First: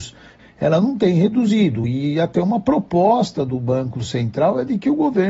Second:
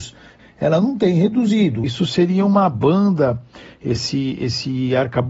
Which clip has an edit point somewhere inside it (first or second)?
second